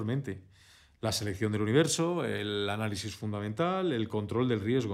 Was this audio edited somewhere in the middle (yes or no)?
no